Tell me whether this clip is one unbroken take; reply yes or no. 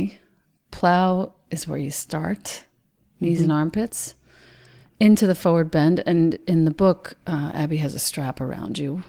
yes